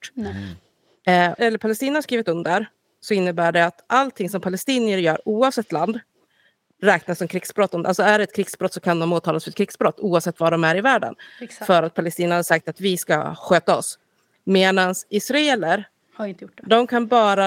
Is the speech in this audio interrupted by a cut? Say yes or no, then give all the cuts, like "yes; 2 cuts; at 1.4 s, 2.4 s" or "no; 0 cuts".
yes; 1 cut; at 1.4 s